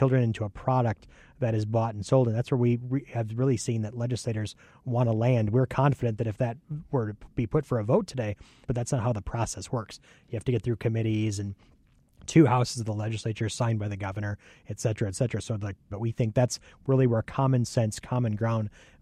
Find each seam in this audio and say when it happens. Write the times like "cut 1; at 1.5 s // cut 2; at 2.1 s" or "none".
cut 1; at 8.6 s // cut 2; at 15.9 s